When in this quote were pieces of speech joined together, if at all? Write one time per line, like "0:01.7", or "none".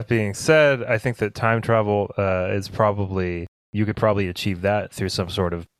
none